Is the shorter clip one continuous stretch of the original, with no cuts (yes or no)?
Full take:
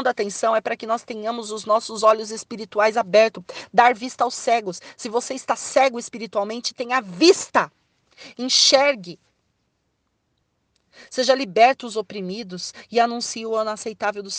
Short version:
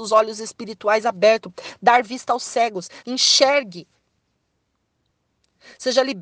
no